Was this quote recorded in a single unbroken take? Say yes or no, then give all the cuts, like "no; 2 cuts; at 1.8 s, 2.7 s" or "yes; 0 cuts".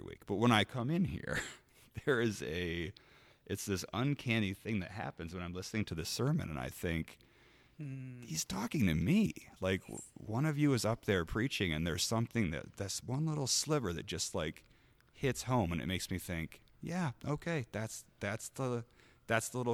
yes; 0 cuts